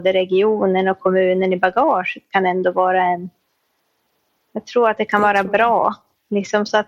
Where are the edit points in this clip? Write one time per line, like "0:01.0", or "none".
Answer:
none